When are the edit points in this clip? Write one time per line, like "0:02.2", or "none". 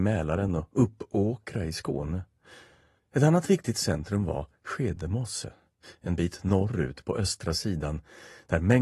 0:03.0